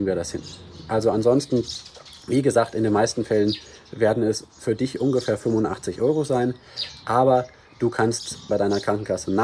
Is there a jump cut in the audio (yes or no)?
yes